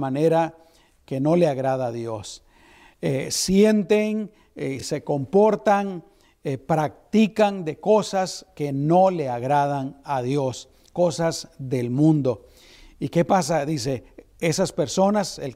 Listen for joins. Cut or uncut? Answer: uncut